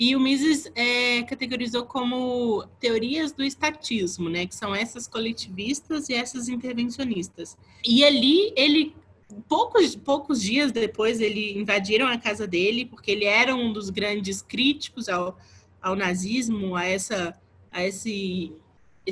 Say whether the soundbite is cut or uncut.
cut